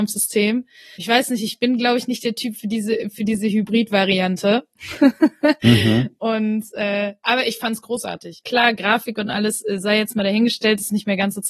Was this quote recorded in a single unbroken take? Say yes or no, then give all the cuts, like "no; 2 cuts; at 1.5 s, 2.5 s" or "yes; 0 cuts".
no; 2 cuts; at 0.9 s, 8.4 s